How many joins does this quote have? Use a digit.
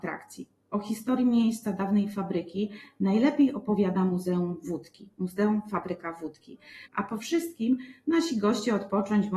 1